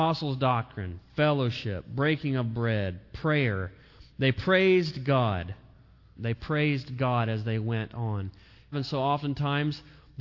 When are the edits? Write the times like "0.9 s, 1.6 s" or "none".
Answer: 6.2 s, 8.7 s